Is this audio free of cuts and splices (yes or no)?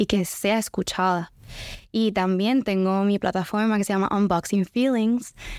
yes